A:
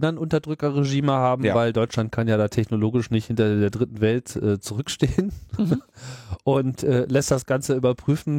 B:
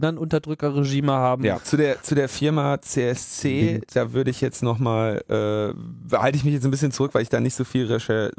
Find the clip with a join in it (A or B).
B